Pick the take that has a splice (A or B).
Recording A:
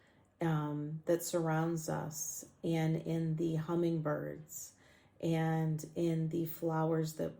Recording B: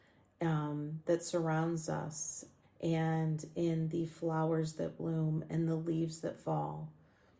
B